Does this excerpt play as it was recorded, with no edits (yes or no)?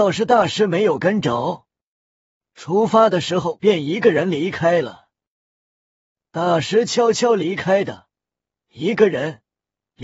no